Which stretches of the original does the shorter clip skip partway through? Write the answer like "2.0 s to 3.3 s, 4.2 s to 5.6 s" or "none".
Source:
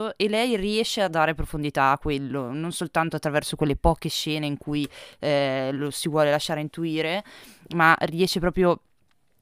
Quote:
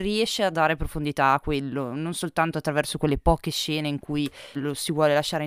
5.1 s to 5.7 s